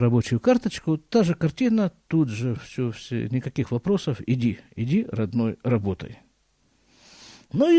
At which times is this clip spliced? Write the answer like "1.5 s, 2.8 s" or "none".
2.6 s